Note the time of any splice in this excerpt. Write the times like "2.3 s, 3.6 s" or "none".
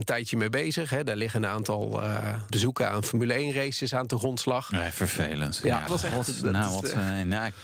2.5 s, 5.9 s